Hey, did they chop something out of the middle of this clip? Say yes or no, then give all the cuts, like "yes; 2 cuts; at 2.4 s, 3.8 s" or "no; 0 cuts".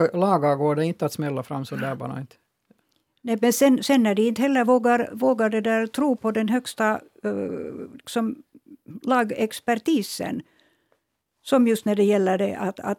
yes; 1 cut; at 6.2 s